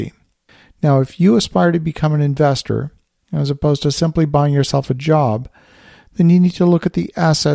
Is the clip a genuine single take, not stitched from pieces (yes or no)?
yes